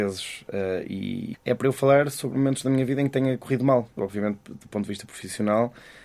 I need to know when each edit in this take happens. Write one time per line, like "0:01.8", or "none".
0:01.3
0:04.0

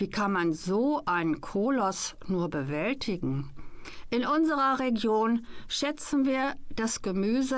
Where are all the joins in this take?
none

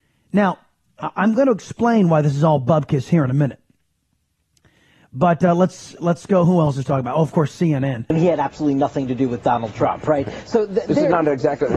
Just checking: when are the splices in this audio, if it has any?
none

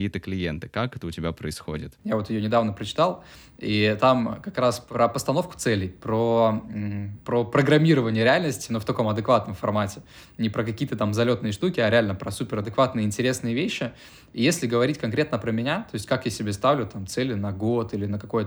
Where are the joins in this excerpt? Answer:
0:02.0

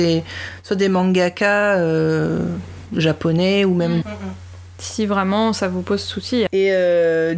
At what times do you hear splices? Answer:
0:04.0
0:06.5

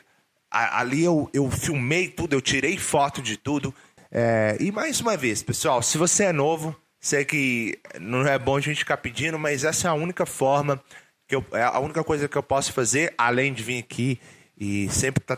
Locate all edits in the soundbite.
0:04.0

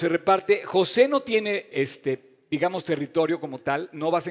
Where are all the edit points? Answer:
0:01.7

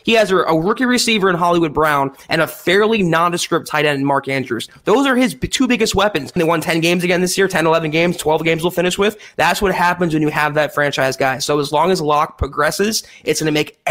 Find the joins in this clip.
0:06.4

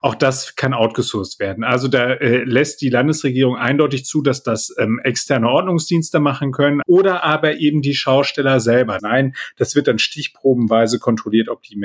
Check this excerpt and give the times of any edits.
0:06.8
0:09.0

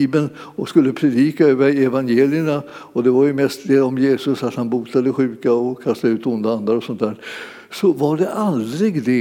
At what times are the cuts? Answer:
none

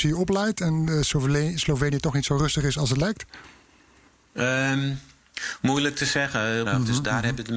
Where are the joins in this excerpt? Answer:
0:06.6

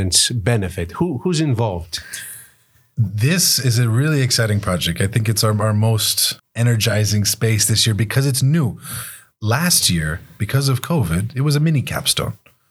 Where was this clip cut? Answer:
0:06.4

